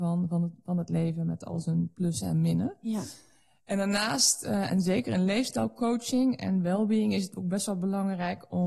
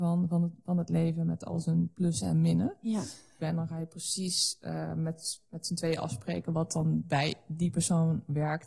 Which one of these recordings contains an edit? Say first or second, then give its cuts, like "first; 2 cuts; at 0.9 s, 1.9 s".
second; 1 cut; at 3.4 s